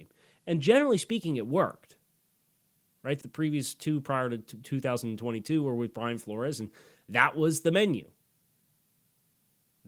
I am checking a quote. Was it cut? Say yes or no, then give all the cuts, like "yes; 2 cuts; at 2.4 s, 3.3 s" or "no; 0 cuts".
yes; 1 cut; at 3.2 s